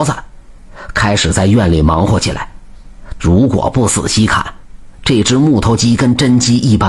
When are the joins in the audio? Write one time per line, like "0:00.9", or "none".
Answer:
0:03.2